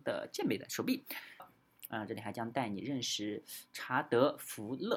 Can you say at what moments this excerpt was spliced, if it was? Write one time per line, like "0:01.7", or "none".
0:01.4